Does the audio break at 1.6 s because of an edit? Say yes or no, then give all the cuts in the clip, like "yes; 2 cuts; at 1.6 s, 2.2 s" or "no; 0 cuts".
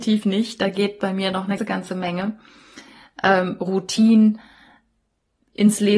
yes; 1 cut; at 1.6 s